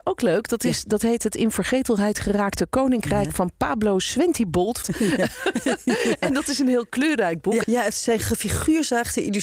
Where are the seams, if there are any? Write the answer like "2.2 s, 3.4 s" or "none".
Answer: 4.8 s, 7.6 s